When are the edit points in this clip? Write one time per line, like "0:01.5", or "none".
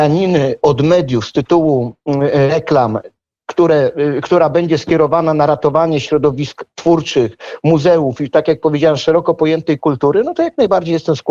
none